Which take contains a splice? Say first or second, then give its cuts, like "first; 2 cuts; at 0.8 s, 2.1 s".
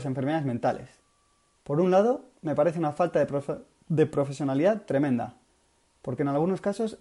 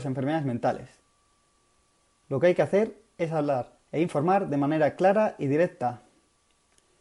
first; 1 cut; at 1.5 s